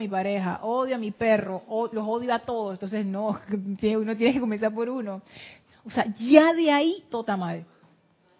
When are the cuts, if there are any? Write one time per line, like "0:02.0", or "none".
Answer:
0:05.7